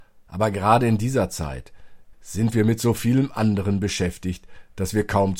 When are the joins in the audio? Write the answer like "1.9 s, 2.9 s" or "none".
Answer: 2.1 s